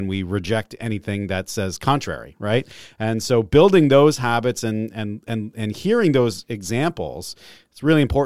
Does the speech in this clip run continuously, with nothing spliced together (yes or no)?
yes